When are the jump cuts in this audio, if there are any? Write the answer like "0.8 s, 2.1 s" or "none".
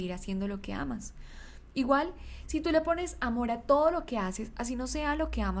none